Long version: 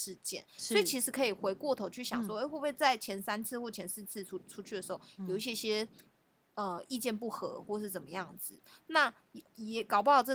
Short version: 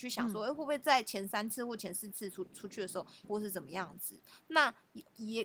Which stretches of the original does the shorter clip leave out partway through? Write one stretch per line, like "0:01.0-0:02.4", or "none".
0:05.2-0:07.6